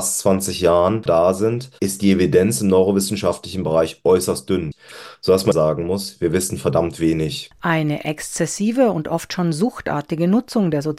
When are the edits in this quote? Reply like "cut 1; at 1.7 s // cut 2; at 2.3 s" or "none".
cut 1; at 1.8 s